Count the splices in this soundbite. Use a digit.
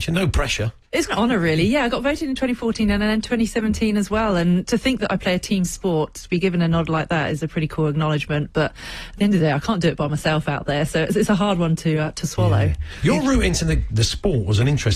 2